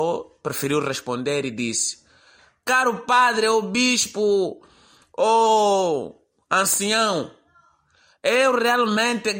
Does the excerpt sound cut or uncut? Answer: uncut